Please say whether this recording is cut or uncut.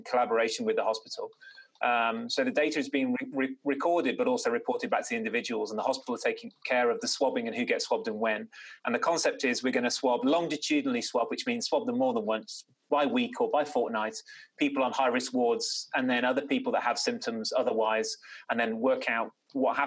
uncut